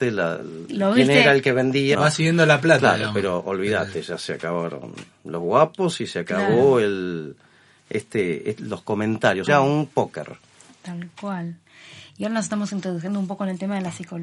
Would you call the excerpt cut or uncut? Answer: cut